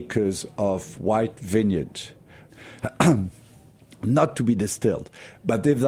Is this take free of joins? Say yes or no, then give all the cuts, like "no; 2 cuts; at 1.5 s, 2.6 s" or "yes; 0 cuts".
no; 1 cut; at 2.5 s